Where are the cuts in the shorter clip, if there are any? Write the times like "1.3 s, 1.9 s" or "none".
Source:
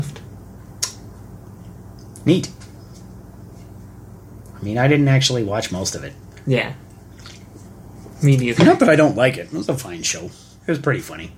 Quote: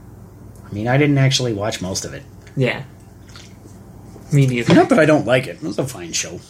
none